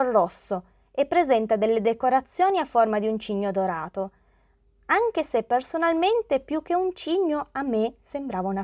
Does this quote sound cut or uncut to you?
uncut